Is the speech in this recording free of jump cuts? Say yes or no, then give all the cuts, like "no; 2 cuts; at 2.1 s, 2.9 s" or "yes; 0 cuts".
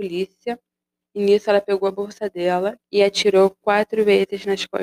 no; 2 cuts; at 1.0 s, 2.8 s